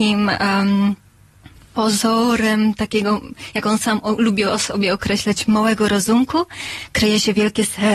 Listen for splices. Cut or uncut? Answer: uncut